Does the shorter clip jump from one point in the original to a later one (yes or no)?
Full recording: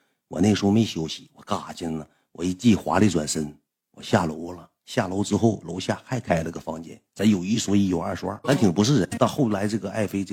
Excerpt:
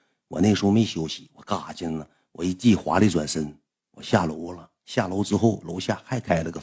no